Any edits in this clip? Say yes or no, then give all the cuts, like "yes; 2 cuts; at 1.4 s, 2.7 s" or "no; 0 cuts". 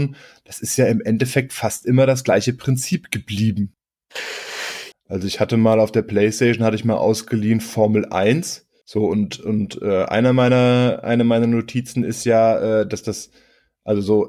yes; 2 cuts; at 4.9 s, 8.8 s